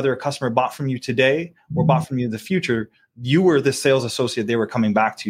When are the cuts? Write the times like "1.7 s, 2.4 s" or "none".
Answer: none